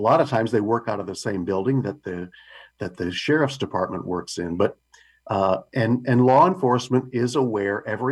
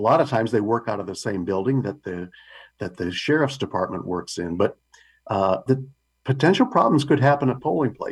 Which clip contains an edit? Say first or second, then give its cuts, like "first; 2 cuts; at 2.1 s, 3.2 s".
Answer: second; 1 cut; at 5.7 s